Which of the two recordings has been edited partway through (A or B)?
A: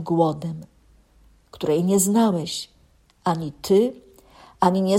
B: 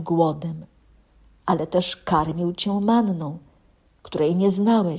A